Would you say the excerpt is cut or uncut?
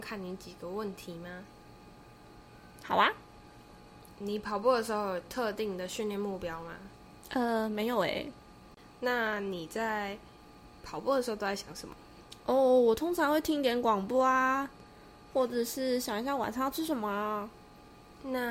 cut